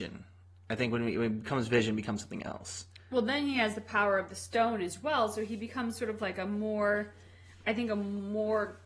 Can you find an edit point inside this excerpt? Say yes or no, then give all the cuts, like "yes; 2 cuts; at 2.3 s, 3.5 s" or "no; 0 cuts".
no; 0 cuts